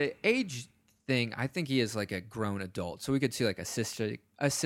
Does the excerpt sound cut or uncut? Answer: uncut